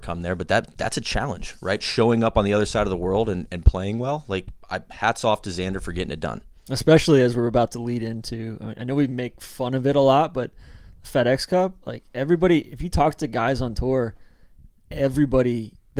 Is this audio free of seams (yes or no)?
yes